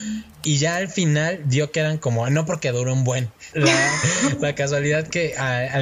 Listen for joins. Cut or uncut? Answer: cut